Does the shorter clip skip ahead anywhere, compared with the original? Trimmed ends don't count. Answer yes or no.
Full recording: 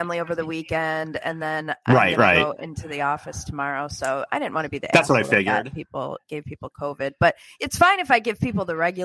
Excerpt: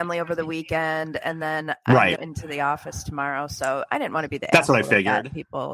yes